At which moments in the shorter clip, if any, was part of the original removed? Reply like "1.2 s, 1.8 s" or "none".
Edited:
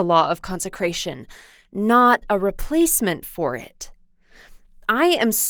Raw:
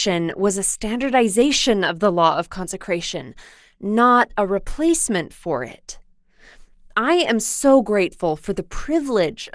none